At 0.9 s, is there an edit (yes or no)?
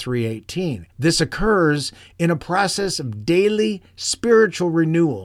yes